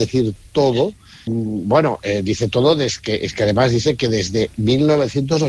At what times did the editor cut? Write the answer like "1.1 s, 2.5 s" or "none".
1.3 s